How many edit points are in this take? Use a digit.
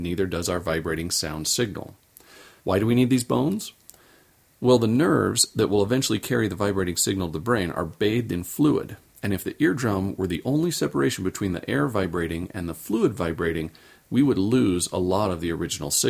1